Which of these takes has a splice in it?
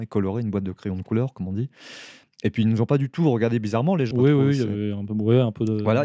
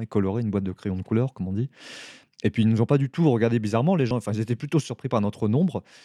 first; 1 cut; at 4.1 s

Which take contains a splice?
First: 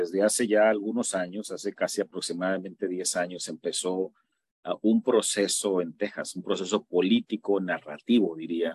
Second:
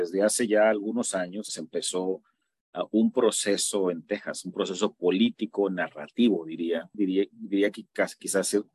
second; 2 cuts; at 1.5 s, 6.9 s

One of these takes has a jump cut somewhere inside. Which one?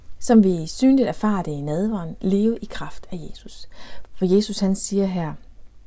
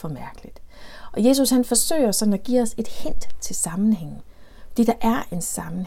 first; 1 cut; at 4.1 s

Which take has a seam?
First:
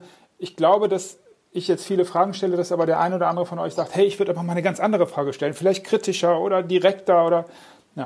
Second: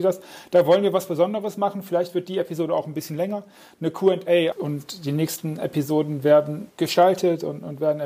second; 2 cuts; at 4.5 s, 6.7 s

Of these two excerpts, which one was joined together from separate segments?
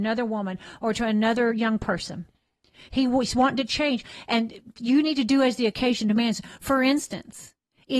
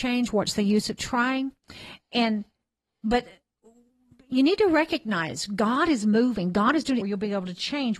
second; 1 cut; at 7.0 s

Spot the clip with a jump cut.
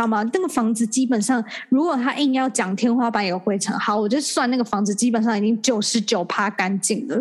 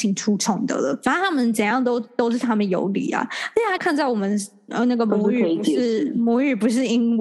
second; 1 cut; at 3.8 s

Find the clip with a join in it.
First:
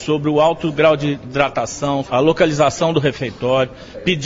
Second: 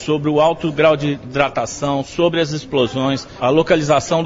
first; 1 cut; at 2.0 s

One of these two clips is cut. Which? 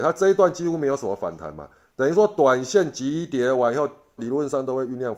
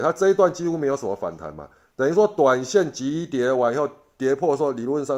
first; 1 cut; at 4.2 s

